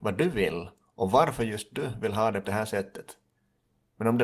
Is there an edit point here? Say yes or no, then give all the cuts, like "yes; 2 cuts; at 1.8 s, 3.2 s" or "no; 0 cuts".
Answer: yes; 1 cut; at 2.4 s